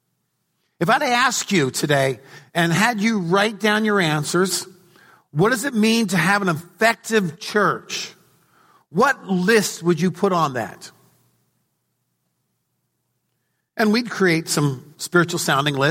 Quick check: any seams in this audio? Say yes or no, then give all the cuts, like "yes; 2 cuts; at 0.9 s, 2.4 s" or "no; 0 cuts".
no; 0 cuts